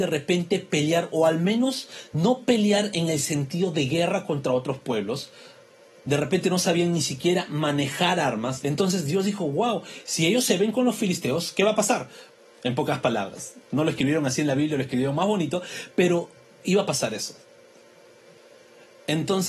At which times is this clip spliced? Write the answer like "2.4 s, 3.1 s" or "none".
8.6 s, 12.4 s